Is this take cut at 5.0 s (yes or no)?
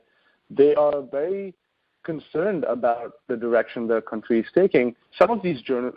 yes